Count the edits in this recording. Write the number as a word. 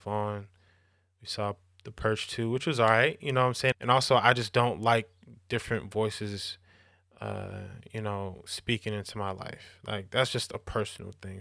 one